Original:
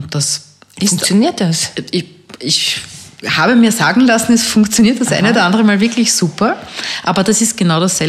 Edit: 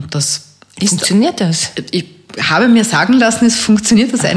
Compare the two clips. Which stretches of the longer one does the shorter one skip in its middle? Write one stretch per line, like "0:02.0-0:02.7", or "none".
0:02.4-0:03.2